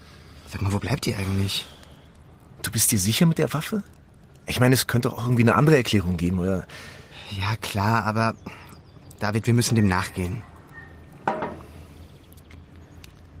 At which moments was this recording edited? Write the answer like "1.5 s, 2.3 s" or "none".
none